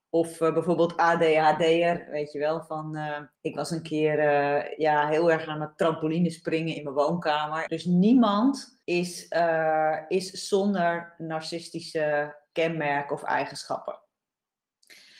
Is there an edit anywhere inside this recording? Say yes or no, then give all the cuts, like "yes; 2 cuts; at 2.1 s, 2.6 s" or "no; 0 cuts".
yes; 3 cuts; at 3.3 s, 7.7 s, 8.8 s